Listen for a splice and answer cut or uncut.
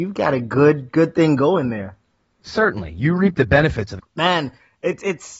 cut